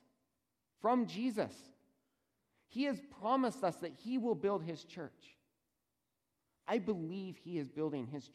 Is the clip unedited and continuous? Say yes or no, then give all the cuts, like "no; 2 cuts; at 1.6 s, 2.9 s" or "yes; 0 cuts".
yes; 0 cuts